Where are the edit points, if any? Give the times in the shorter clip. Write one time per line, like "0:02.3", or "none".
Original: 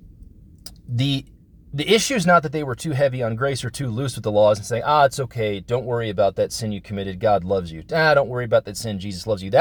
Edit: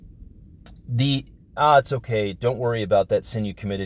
0:01.6